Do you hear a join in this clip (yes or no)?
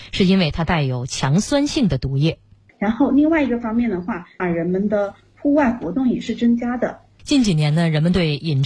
yes